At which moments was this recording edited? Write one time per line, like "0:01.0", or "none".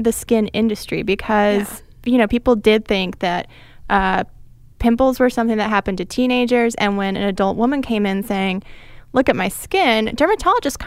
none